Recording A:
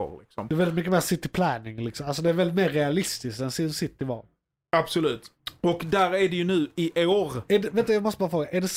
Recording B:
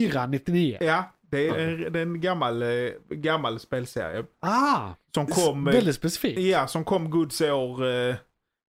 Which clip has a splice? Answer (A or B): B